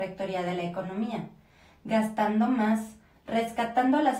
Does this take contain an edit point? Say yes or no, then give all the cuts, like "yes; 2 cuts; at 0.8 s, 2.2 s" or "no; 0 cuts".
yes; 1 cut; at 3.2 s